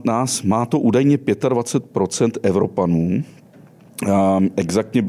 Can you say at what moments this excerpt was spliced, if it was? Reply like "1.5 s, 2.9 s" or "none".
none